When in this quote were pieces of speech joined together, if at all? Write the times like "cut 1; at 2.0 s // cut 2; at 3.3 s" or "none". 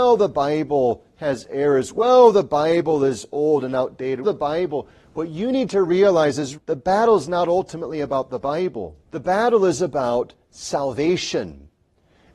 cut 1; at 4.2 s // cut 2; at 6.6 s // cut 3; at 9.0 s